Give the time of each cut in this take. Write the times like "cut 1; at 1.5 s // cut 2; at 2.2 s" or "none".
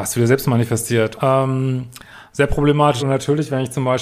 cut 1; at 1.1 s // cut 2; at 3.0 s